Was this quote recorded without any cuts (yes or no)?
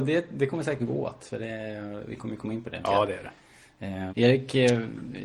no